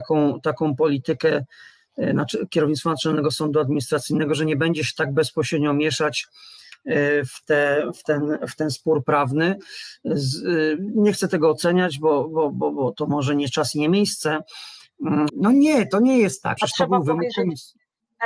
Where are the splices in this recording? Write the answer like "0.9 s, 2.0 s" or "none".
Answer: 15.3 s, 16.6 s